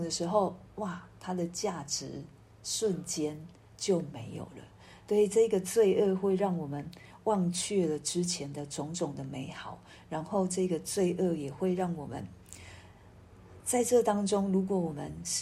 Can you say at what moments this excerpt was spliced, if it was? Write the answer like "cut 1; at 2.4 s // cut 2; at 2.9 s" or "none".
none